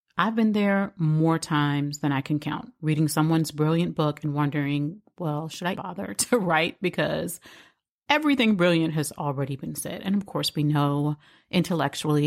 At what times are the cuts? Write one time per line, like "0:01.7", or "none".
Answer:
0:05.7